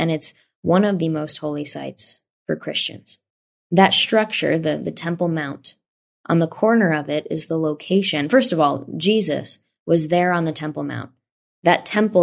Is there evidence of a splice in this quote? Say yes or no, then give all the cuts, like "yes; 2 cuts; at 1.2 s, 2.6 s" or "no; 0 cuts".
no; 0 cuts